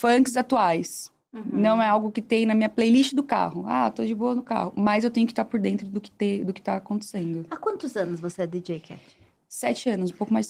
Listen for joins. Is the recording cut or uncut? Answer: uncut